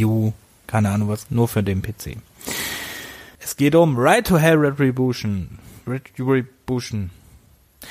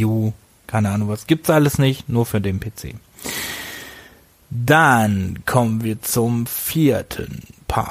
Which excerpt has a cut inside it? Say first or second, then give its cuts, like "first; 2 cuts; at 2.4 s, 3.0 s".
first; 2 cuts; at 1.3 s, 3.4 s